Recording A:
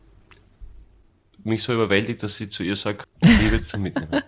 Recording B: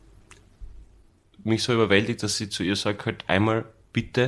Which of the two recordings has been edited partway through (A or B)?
A